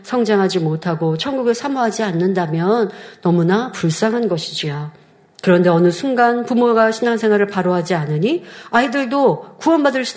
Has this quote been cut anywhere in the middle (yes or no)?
yes